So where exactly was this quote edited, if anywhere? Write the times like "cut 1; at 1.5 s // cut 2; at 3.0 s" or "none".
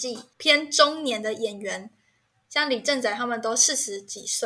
none